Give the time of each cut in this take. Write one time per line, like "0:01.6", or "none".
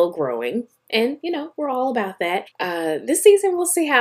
0:02.5